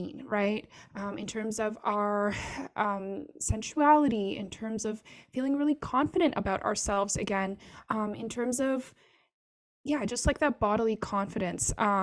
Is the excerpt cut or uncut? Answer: uncut